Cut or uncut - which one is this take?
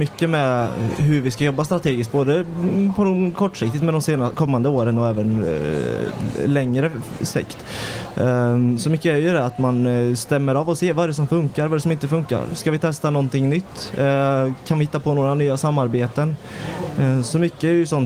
uncut